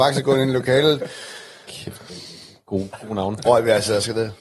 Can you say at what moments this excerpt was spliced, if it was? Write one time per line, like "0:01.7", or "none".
0:01.7
0:03.4